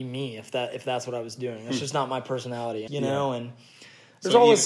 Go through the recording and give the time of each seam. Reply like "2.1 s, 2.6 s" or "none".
2.9 s